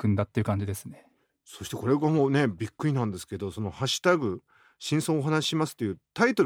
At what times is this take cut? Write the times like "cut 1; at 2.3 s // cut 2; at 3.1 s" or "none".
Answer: none